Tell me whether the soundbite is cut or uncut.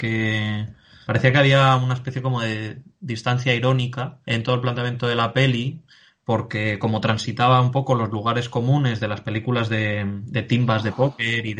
cut